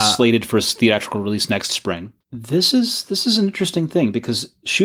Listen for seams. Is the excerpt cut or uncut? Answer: cut